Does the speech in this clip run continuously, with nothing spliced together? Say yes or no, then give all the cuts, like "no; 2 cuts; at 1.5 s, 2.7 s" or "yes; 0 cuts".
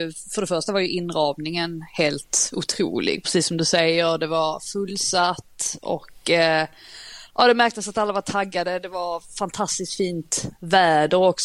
yes; 0 cuts